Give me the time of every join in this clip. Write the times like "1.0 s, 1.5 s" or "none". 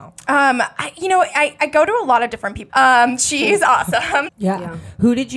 2.7 s, 4.3 s